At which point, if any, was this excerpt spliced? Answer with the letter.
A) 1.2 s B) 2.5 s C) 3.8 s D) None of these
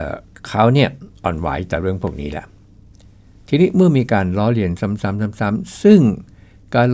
A